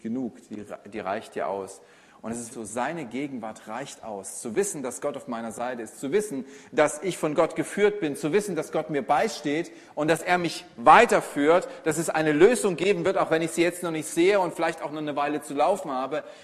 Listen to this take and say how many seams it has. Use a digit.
1